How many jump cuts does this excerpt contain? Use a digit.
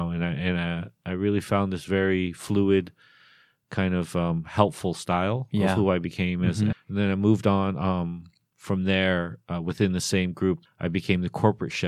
2